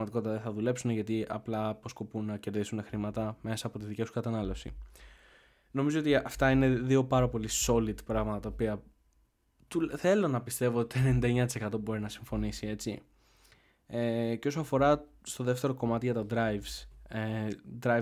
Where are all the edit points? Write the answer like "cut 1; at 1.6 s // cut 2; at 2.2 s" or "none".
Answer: none